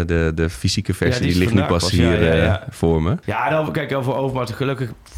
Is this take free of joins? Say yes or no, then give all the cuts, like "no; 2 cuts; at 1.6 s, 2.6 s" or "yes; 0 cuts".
no; 1 cut; at 3.2 s